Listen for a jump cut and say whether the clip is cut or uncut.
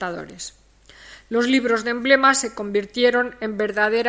uncut